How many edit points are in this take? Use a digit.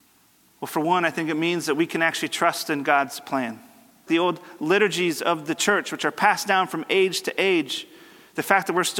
1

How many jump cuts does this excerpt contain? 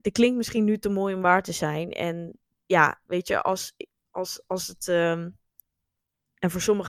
0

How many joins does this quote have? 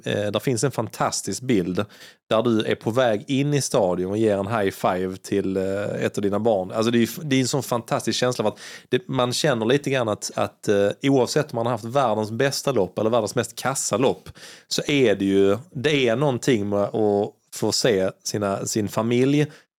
0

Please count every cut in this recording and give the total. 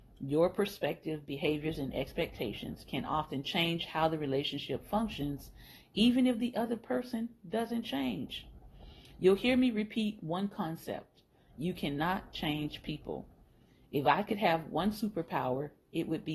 0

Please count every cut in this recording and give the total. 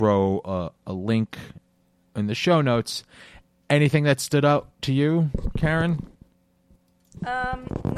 0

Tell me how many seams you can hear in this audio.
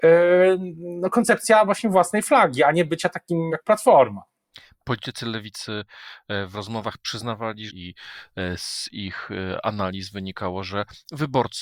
2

